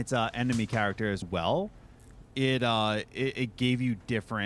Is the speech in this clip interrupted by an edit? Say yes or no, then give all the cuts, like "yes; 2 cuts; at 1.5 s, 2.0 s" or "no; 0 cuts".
yes; 2 cuts; at 1.2 s, 2.2 s